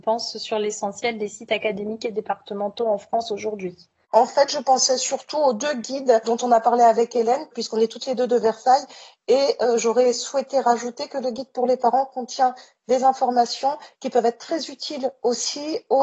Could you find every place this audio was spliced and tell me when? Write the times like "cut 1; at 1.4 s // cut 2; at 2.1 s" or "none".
cut 1; at 4.0 s